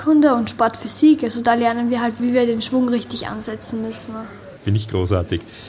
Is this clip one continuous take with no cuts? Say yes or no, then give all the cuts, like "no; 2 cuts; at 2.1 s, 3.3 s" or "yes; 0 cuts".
no; 2 cuts; at 2.2 s, 4.6 s